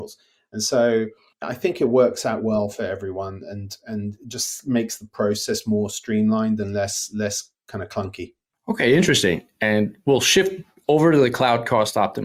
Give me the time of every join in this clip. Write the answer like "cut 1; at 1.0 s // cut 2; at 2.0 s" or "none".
none